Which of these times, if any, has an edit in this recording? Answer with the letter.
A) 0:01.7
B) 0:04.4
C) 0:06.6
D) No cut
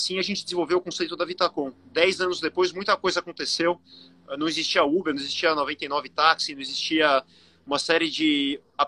A